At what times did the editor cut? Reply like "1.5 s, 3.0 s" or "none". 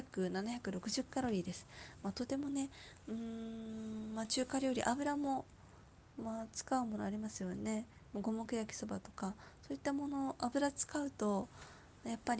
none